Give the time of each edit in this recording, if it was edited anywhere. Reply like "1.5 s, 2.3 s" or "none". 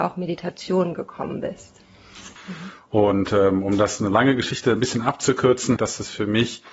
2.4 s, 5.8 s